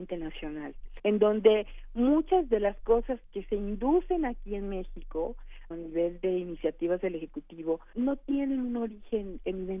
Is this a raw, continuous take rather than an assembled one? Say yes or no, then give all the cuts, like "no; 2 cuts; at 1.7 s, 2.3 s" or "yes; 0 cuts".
no; 3 cuts; at 1.0 s, 5.7 s, 7.9 s